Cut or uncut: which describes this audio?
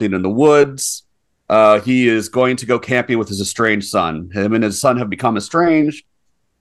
cut